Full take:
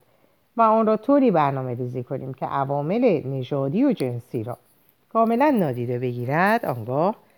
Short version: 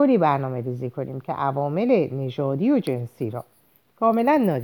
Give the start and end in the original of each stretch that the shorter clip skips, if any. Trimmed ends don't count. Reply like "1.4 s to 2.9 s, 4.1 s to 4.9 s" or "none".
none